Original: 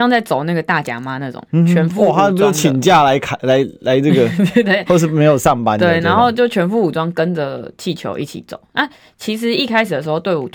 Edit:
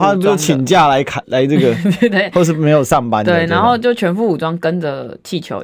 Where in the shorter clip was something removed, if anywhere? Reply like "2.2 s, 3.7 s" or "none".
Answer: 1.2 s